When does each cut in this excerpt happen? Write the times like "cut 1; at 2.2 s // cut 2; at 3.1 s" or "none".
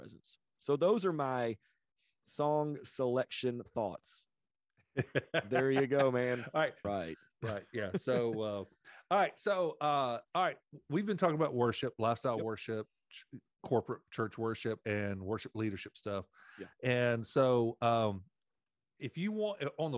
cut 1; at 6.8 s